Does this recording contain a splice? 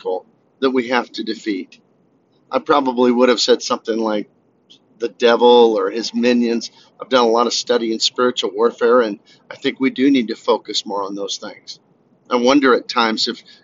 no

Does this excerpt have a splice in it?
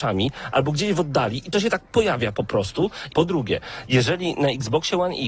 yes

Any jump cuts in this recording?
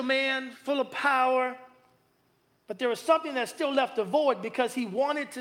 no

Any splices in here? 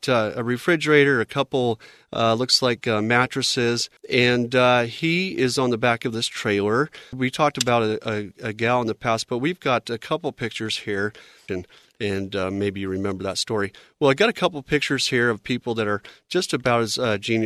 yes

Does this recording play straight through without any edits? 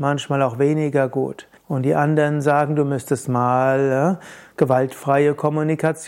no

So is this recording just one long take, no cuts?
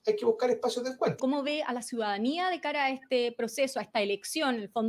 no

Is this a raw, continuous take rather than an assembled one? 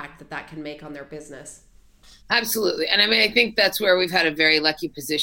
no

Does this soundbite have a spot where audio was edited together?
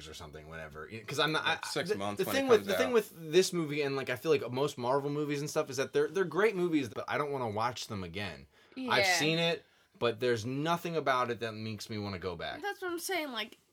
yes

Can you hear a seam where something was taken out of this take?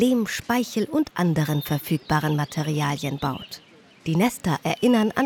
no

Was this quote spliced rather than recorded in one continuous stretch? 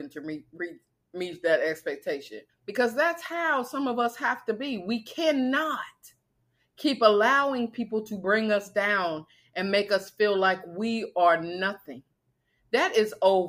yes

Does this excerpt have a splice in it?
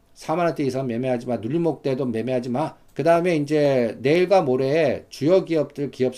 yes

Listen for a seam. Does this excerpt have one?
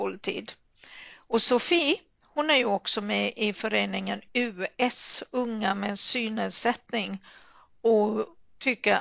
no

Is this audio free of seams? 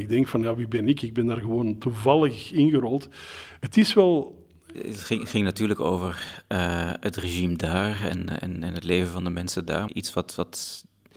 no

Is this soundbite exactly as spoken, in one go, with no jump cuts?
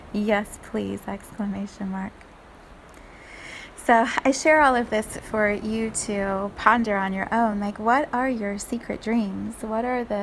yes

